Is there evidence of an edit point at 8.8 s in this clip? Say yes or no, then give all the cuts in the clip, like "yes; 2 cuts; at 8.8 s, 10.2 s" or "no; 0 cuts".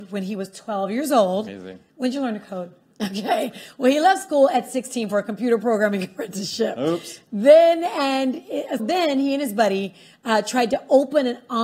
yes; 2 cuts; at 2.9 s, 8.8 s